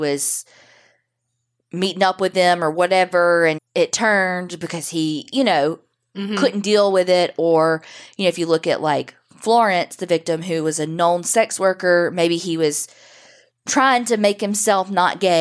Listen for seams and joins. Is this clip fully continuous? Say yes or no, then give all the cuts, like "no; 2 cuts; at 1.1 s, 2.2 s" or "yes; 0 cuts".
no; 1 cut; at 3.6 s